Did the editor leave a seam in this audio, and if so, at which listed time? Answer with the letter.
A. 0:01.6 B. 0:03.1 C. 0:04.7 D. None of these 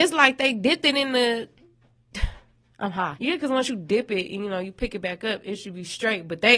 B